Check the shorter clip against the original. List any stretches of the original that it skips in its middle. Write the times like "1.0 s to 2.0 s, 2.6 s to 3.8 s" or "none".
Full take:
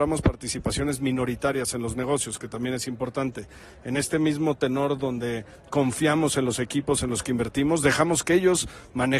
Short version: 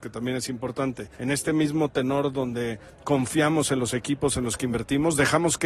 3.5 s to 3.8 s